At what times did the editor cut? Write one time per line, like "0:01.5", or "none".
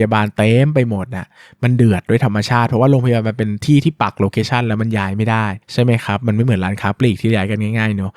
0:05.6